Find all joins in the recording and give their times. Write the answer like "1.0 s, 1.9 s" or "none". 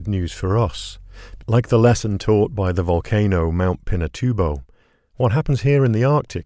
1.4 s